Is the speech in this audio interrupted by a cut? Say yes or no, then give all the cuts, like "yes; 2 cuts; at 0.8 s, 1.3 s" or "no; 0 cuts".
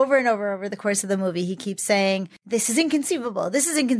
yes; 1 cut; at 2.4 s